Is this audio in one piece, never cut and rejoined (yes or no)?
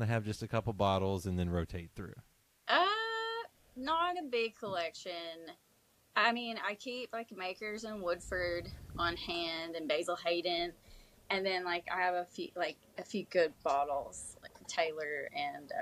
yes